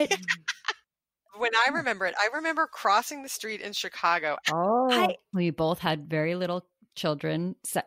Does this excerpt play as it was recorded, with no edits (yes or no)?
no